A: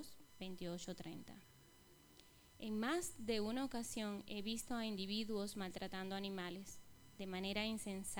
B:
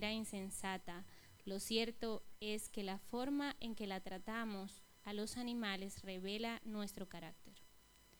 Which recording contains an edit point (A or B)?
B